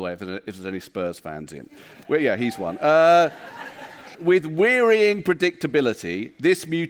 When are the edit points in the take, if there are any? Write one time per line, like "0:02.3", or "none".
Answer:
0:02.0
0:04.1